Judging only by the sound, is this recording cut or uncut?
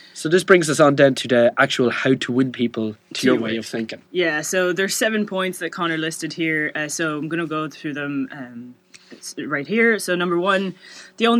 uncut